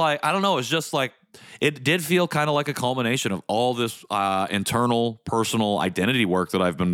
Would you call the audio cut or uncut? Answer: uncut